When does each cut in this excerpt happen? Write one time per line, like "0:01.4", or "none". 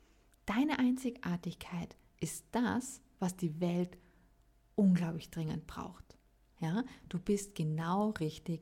0:06.5